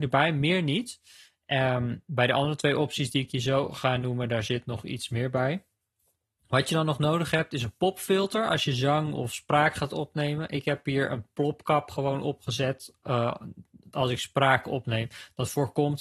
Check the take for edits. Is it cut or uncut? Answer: uncut